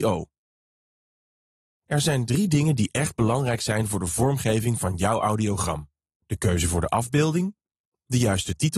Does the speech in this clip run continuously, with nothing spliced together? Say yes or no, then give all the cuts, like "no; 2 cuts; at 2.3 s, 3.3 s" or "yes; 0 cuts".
yes; 0 cuts